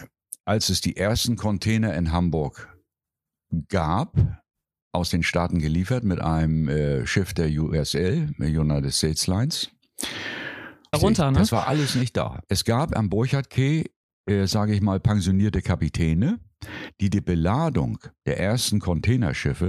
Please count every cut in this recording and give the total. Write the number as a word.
one